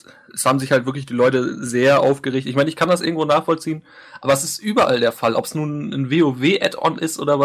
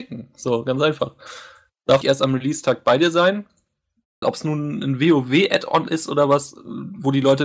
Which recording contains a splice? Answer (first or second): second